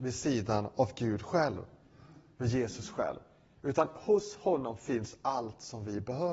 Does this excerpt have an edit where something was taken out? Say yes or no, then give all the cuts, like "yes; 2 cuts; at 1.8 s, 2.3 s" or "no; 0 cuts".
no; 0 cuts